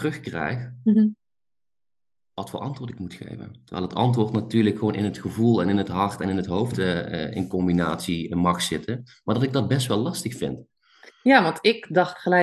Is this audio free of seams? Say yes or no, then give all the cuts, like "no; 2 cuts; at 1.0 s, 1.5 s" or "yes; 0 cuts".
yes; 0 cuts